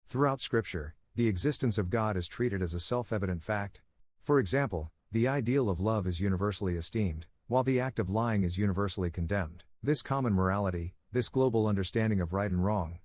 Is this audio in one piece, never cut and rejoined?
no; 2 cuts; at 4.0 s, 9.7 s

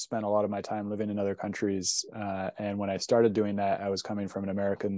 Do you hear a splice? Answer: no; 0 cuts

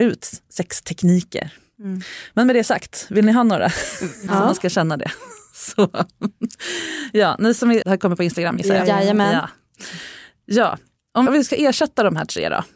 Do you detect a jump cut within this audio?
yes; 3 cuts; at 4.3 s, 7.8 s, 11.3 s

